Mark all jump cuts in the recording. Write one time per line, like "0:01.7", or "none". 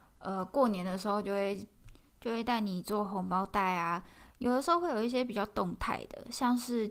none

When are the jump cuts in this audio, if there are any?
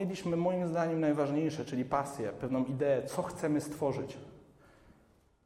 none

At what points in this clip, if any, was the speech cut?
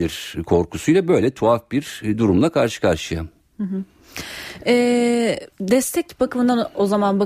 0:05.5

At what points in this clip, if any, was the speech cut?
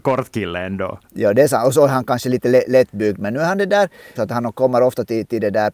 0:04.2

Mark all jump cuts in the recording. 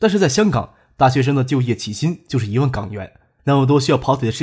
0:03.4

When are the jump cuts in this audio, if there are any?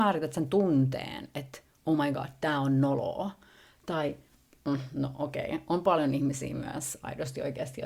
none

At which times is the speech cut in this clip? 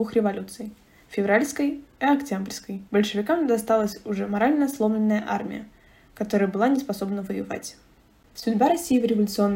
0:02.9

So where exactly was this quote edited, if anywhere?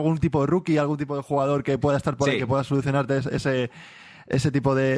none

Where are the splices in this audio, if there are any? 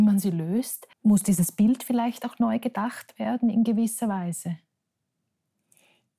0:00.9

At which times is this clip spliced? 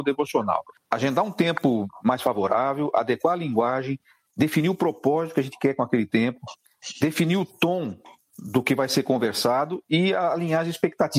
none

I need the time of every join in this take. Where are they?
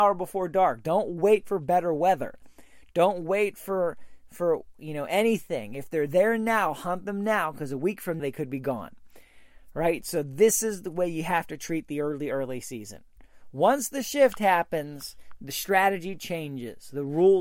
0:08.2

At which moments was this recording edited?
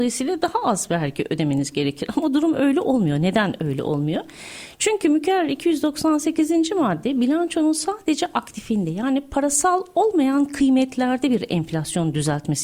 none

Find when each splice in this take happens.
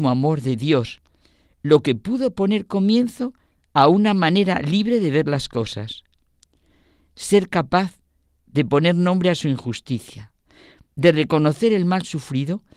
none

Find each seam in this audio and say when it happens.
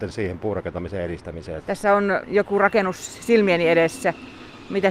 0:01.6

